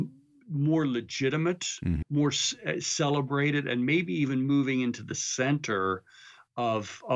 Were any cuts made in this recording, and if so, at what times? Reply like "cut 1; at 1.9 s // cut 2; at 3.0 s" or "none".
cut 1; at 2.0 s